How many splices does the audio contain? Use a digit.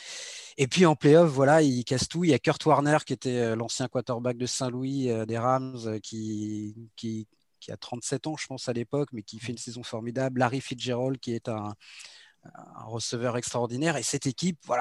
0